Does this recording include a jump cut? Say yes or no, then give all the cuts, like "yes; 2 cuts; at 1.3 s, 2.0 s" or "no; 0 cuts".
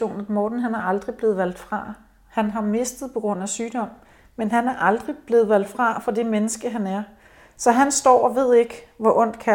no; 0 cuts